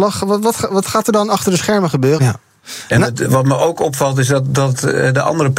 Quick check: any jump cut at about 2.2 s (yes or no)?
yes